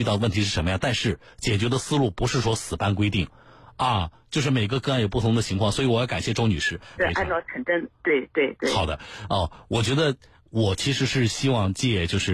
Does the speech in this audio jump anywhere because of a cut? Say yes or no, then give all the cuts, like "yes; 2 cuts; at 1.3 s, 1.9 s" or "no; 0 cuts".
yes; 1 cut; at 7.0 s